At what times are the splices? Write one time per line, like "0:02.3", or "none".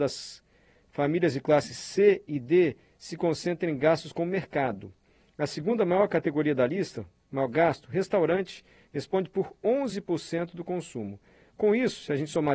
none